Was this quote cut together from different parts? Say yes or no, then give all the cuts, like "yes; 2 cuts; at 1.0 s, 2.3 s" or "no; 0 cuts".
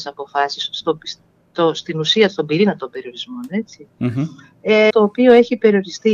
yes; 1 cut; at 4.9 s